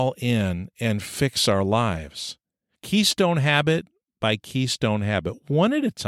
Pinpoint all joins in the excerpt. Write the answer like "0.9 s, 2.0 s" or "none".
2.7 s